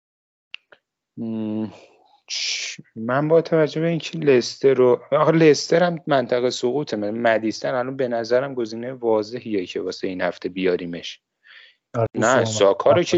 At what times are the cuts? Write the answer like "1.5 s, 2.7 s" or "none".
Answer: 12.1 s